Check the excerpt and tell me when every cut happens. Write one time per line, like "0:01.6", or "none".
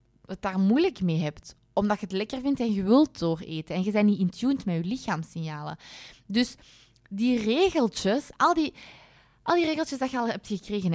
none